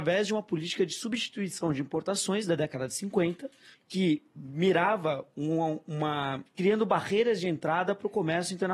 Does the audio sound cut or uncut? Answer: cut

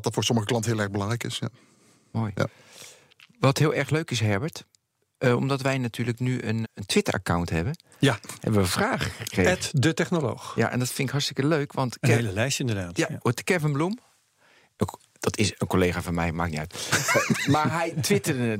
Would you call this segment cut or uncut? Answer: cut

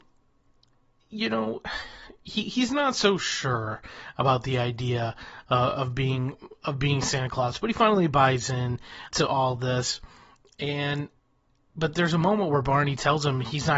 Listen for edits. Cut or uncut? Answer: cut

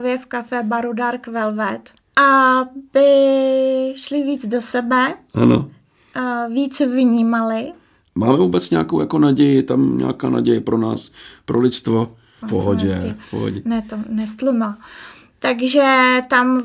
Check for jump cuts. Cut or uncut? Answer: cut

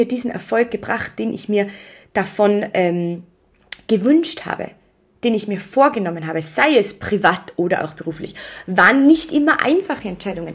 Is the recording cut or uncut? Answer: uncut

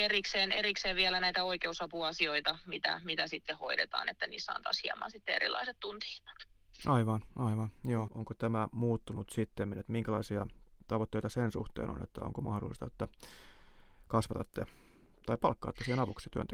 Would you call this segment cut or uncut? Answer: cut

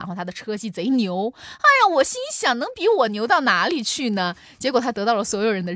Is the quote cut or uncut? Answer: uncut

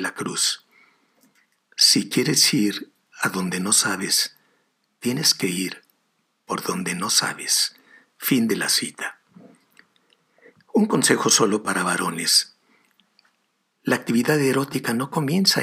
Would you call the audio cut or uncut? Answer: uncut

